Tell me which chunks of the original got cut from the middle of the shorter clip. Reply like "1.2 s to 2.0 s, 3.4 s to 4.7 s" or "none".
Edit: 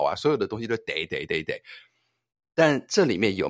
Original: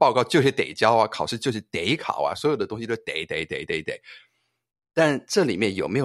3.3 s to 3.5 s